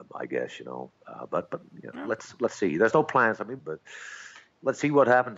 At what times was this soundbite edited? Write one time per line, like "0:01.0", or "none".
0:03.6